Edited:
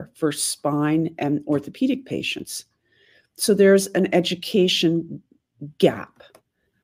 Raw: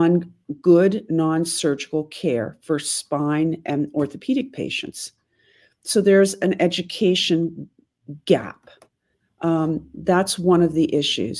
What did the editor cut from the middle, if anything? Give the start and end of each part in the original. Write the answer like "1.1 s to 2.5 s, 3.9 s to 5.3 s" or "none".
none